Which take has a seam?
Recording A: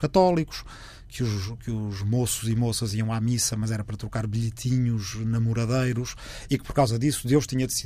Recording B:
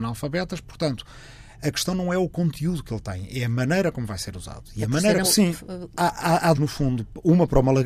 B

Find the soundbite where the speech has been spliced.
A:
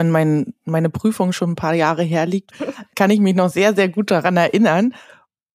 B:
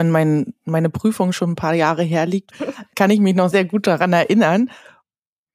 B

